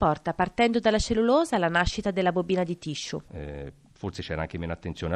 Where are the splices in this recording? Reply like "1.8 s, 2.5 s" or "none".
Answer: 3.3 s